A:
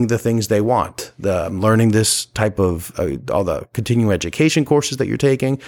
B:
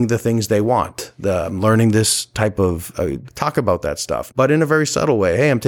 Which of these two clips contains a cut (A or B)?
B